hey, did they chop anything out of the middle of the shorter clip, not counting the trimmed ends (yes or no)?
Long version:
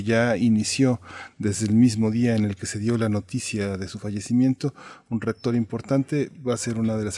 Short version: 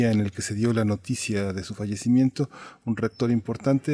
no